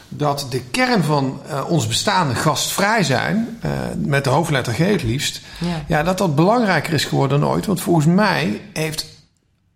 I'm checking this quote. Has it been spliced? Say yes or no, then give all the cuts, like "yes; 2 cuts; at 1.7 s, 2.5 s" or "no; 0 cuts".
no; 0 cuts